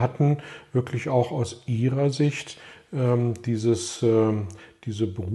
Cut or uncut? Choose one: uncut